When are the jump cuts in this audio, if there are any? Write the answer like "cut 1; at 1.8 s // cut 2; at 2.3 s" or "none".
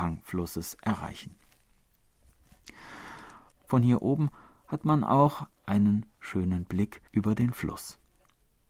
cut 1; at 3.5 s // cut 2; at 7.1 s